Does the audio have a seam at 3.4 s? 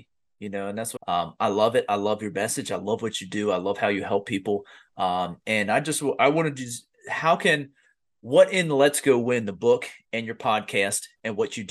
no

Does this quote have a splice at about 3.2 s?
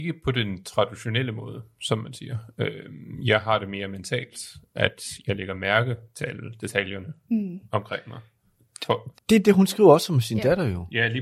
no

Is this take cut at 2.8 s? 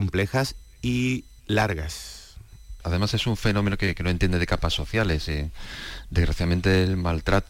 yes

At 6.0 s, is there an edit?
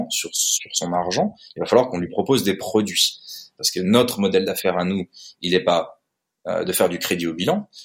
no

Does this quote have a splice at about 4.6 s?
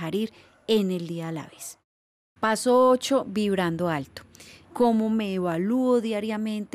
yes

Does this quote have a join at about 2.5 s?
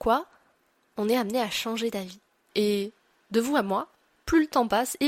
yes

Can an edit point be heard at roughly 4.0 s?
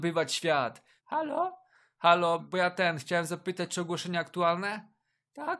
no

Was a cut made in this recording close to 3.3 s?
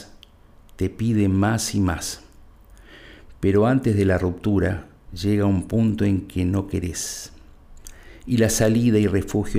no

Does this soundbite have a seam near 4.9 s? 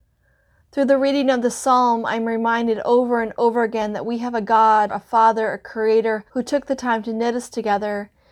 yes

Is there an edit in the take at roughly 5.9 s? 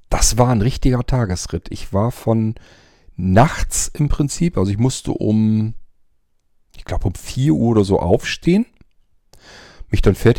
no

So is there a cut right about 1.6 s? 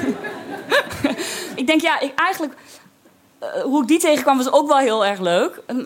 yes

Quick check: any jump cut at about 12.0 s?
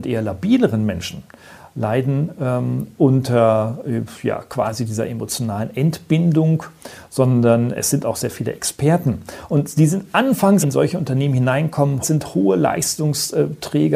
yes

